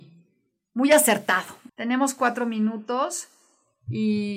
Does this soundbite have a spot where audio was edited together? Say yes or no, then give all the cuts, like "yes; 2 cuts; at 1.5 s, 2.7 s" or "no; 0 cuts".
yes; 1 cut; at 1.7 s